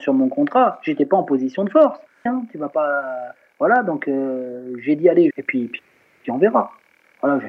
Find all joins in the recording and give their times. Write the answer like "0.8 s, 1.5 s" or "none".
2.3 s, 5.3 s